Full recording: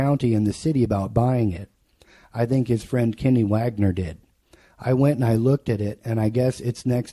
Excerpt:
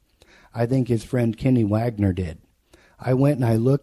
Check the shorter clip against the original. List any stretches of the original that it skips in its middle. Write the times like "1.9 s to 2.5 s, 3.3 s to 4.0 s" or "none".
none